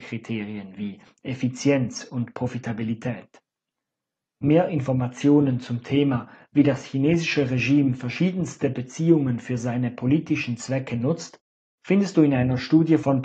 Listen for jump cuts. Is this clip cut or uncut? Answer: uncut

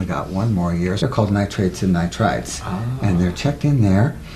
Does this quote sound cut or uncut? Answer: cut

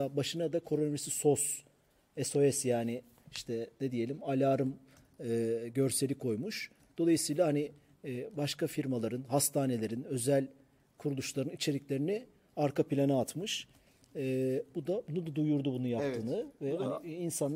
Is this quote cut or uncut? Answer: uncut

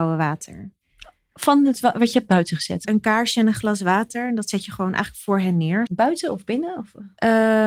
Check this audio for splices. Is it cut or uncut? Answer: cut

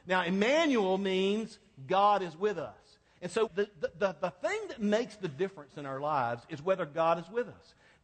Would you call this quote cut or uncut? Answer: cut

